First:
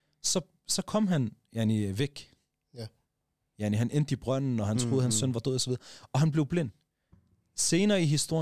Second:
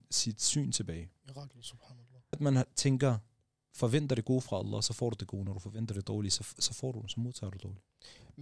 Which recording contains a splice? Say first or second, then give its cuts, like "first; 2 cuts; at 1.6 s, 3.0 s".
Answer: second; 1 cut; at 2.3 s